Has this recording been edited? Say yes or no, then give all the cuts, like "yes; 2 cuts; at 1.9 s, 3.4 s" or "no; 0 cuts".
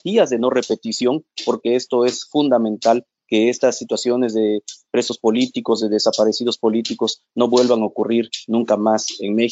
no; 0 cuts